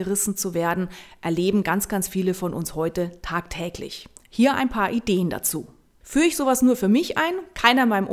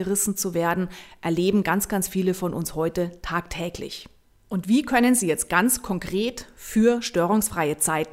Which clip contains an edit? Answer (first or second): first